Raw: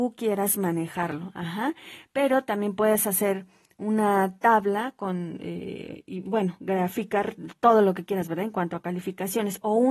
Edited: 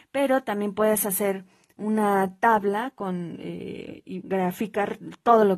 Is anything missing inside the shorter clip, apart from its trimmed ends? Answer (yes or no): yes